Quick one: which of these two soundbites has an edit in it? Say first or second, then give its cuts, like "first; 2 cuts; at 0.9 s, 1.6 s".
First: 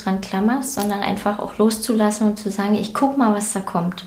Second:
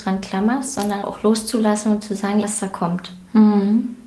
second; 2 cuts; at 1.0 s, 2.4 s